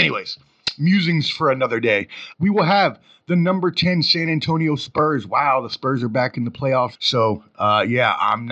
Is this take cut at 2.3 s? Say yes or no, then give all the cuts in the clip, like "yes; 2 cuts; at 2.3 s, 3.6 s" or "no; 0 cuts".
yes; 2 cuts; at 2.3 s, 7.0 s